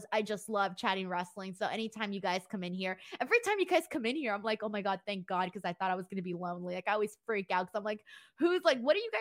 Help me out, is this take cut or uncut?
uncut